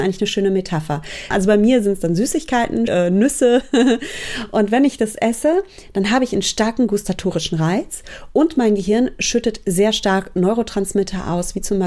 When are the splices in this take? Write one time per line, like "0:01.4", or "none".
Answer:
0:01.3
0:02.9